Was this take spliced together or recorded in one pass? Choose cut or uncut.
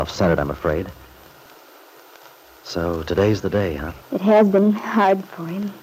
cut